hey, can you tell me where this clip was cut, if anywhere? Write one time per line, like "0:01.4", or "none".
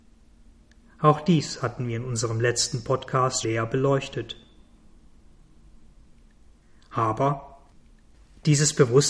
0:03.4